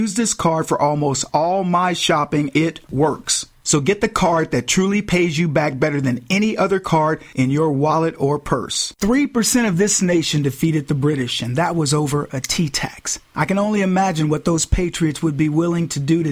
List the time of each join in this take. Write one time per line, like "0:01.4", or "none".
0:02.5